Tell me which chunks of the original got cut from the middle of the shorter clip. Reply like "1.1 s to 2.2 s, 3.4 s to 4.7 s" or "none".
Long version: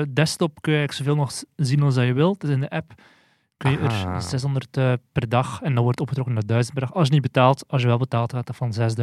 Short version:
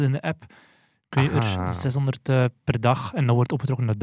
none